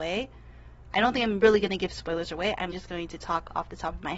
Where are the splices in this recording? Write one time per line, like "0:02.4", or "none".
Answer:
0:02.7